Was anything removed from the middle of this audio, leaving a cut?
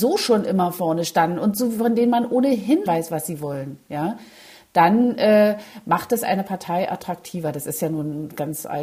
yes; 1 cut; at 2.9 s

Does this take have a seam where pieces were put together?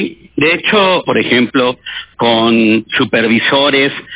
yes; 1 cut; at 1.0 s

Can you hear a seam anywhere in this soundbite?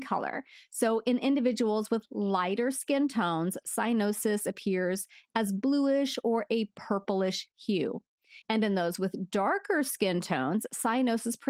yes; 1 cut; at 8.4 s

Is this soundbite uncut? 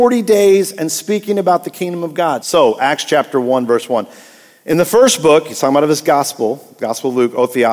no; 1 cut; at 2.4 s

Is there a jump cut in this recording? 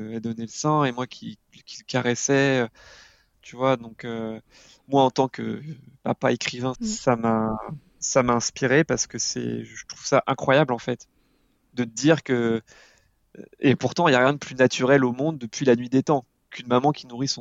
yes; 3 cuts; at 1.5 s, 3.3 s, 6.7 s

